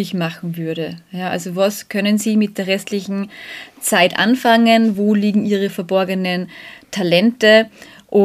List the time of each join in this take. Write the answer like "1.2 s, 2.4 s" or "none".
none

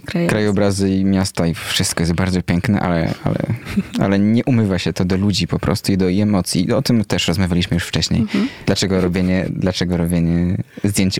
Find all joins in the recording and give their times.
8.6 s

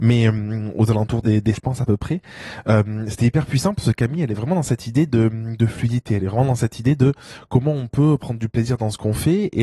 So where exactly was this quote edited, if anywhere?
1.6 s

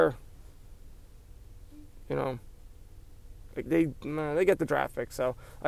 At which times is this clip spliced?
3.7 s

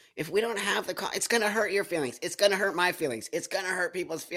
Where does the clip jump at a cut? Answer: none

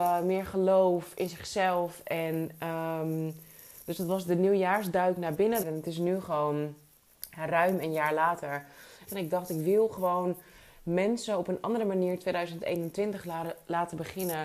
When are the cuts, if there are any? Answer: 5.6 s, 9.1 s

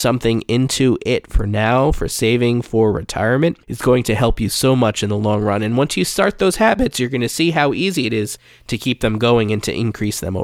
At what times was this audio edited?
3.6 s

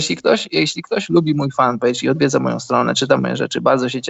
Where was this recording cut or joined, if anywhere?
none

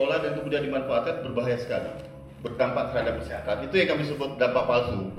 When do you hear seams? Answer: none

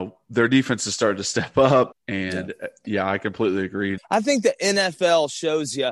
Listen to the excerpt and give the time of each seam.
1.9 s, 4.0 s

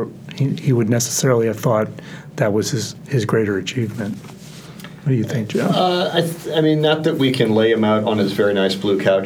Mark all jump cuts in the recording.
none

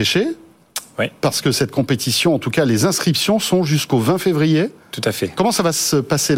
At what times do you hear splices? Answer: none

